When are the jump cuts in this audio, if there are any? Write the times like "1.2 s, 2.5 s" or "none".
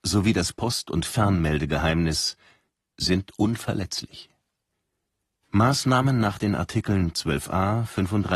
5.4 s